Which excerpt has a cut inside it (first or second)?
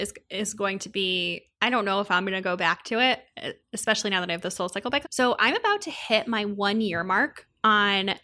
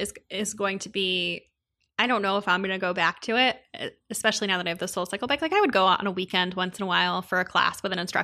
first